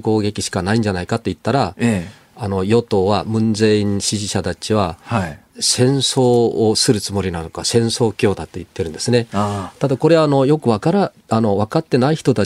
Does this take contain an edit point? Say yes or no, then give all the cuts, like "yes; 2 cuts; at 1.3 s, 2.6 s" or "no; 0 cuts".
no; 0 cuts